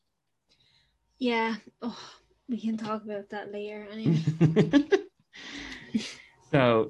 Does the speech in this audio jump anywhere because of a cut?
no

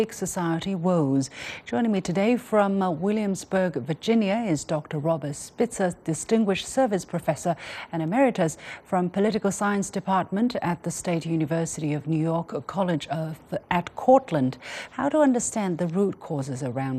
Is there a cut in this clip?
yes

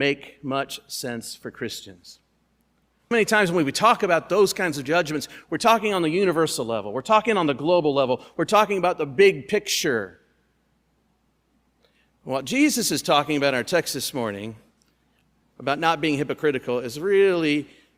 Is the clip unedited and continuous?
no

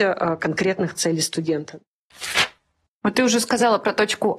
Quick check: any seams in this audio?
no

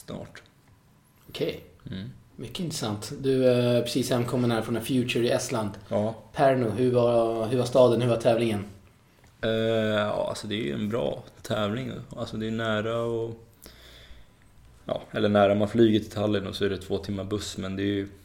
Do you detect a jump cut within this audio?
no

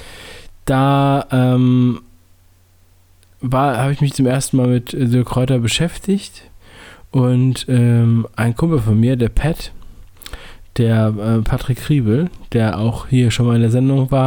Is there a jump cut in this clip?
no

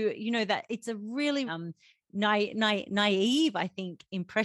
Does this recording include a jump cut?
yes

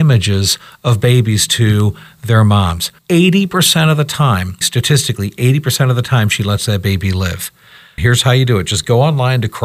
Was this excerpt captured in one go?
no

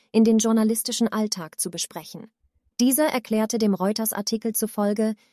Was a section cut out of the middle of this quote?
yes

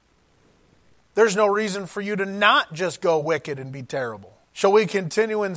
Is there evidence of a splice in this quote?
yes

